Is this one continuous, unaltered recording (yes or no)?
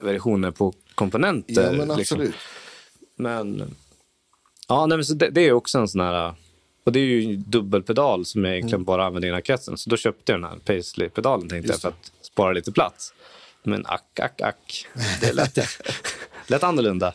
yes